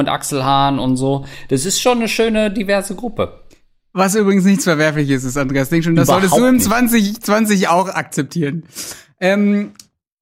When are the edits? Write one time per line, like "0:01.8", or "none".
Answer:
none